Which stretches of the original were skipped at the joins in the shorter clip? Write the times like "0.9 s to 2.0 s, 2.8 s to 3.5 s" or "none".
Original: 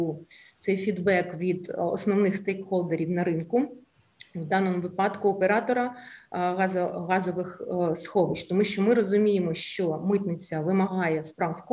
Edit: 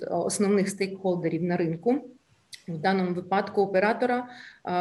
none